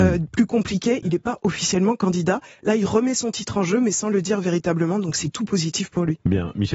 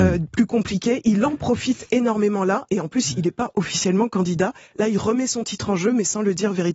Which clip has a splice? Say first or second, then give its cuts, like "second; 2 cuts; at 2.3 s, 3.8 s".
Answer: first; 1 cut; at 1.0 s